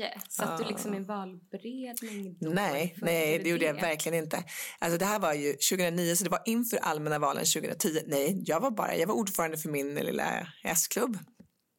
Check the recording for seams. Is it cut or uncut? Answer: uncut